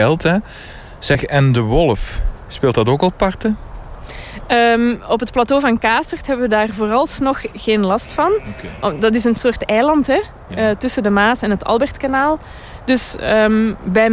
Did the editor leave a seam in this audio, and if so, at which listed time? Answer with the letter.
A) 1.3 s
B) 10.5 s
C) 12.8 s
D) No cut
D